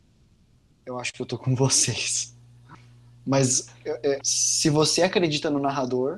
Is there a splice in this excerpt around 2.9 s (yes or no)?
no